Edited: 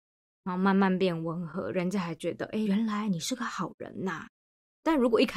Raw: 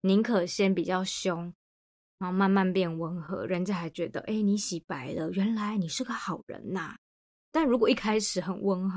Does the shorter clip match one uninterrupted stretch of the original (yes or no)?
no